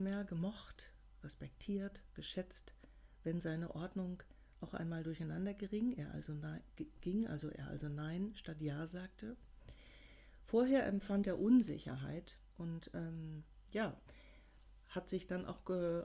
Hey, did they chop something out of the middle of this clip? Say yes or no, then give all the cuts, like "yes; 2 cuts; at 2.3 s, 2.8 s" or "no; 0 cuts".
no; 0 cuts